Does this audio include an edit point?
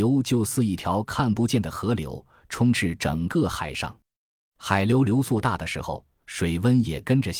yes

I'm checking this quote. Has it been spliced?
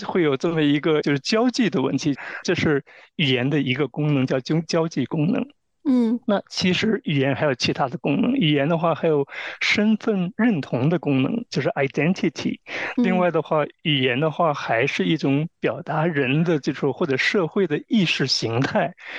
yes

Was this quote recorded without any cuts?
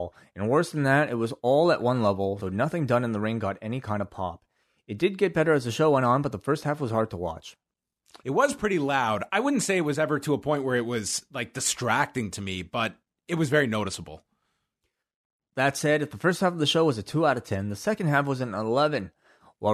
no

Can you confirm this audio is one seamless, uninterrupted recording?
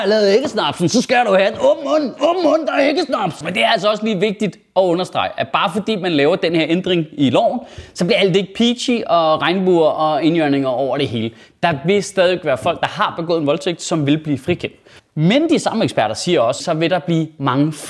no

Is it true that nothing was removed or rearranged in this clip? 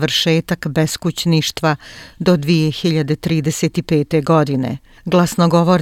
yes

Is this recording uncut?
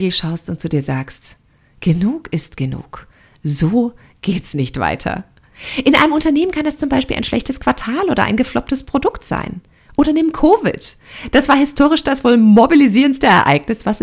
yes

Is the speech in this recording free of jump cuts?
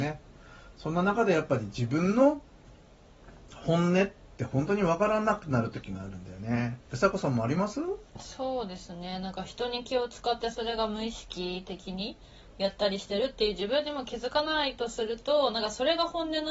no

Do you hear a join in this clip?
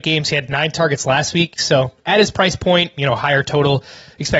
yes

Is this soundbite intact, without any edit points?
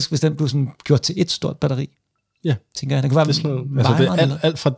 yes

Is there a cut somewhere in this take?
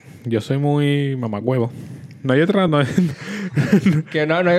no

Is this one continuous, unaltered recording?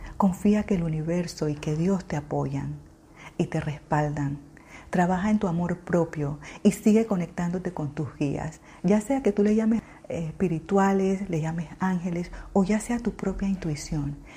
yes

